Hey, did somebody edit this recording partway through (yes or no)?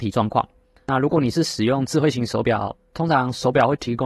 yes